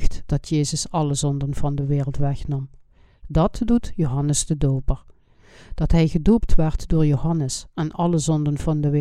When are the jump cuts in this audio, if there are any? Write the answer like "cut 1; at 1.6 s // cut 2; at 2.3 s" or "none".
none